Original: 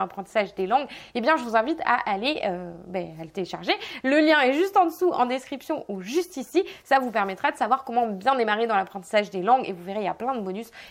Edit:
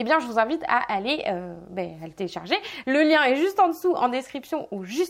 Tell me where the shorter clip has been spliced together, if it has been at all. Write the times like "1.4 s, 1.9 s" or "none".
none